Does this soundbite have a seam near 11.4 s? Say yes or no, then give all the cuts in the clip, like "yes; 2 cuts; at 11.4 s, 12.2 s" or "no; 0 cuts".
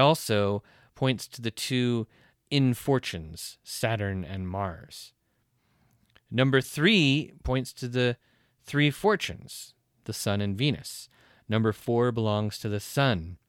no; 1 cut; at 10.0 s